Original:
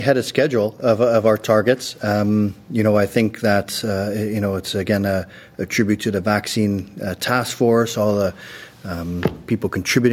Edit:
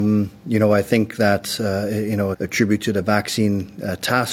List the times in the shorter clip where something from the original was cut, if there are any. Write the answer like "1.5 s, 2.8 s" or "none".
2.3 s